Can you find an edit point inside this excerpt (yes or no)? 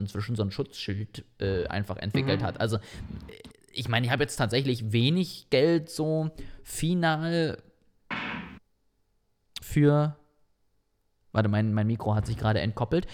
no